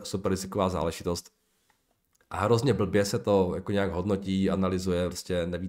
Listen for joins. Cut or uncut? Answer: uncut